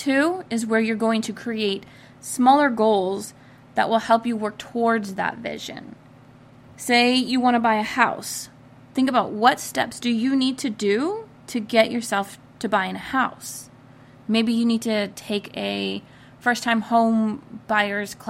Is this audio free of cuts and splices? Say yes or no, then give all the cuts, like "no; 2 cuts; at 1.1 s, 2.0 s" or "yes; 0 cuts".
yes; 0 cuts